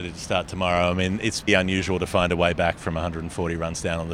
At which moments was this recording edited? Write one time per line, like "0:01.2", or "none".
0:01.5